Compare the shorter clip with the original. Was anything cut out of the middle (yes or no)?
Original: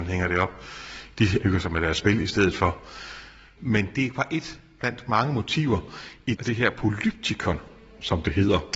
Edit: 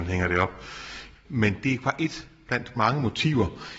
yes